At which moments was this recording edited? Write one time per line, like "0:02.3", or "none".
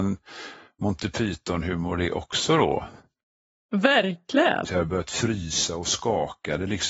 0:04.6